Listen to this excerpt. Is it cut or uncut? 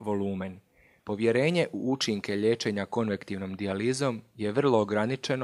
cut